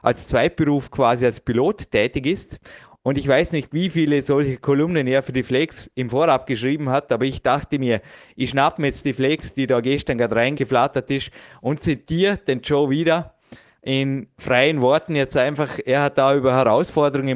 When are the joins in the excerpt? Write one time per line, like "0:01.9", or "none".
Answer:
0:02.9